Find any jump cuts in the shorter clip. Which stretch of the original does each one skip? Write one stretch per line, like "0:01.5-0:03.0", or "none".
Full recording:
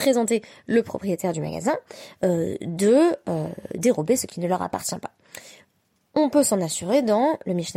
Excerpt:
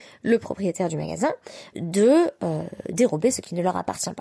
0:02.2-0:02.6

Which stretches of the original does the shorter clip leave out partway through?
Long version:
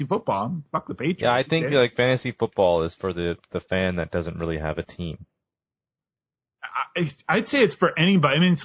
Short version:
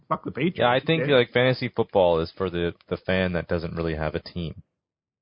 none

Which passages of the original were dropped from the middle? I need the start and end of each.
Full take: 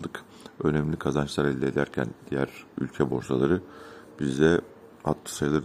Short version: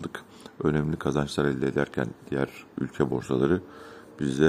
none

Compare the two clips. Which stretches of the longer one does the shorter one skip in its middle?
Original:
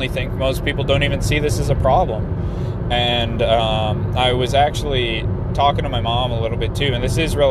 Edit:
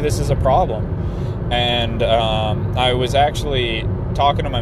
none

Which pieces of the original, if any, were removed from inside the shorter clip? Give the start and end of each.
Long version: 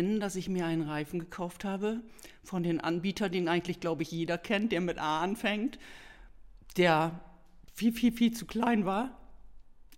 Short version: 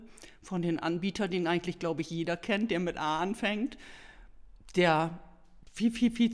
none

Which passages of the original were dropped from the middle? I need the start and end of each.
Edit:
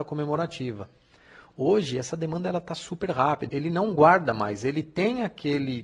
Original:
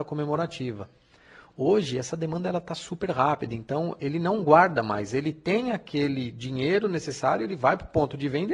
0:03.5-0:04.0

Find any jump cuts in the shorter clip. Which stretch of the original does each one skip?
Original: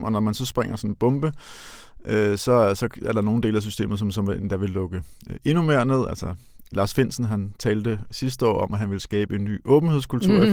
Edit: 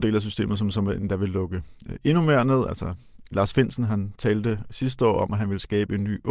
none

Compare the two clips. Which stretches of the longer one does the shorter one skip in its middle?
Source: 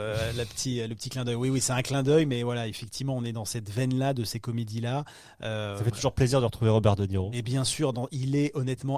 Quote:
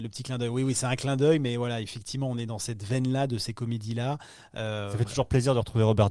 none

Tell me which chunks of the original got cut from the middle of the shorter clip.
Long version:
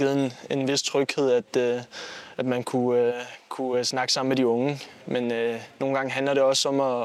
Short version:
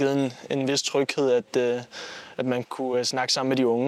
0:02.6-0:03.4

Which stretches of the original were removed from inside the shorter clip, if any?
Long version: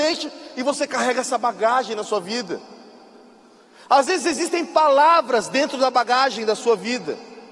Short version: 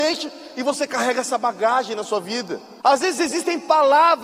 0:02.8-0:03.9

